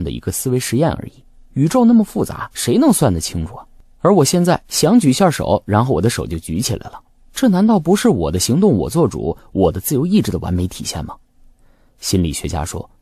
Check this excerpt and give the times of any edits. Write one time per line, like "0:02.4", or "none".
none